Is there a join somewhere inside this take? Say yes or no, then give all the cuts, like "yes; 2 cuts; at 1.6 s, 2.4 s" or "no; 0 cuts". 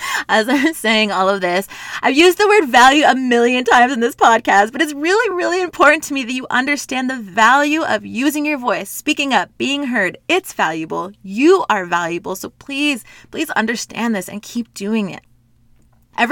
no; 0 cuts